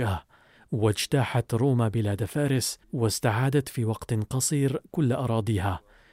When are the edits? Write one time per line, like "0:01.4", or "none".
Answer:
0:02.8